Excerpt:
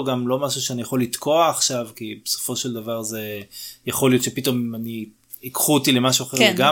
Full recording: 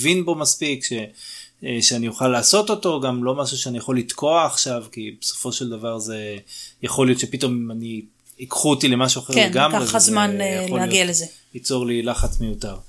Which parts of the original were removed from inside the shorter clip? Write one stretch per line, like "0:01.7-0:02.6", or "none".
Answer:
none